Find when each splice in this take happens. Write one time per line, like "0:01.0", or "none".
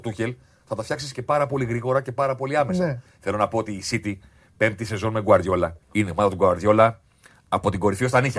0:03.1
0:05.8